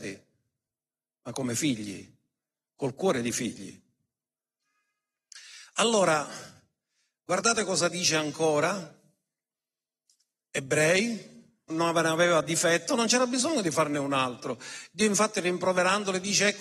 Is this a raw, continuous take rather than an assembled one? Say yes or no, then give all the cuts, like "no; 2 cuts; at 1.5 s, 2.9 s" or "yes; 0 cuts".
no; 1 cut; at 11.7 s